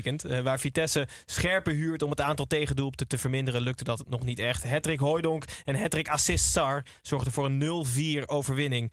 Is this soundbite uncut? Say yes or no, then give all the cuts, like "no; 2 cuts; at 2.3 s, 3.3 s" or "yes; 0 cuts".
yes; 0 cuts